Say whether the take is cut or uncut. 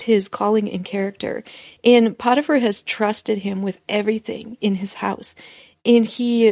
cut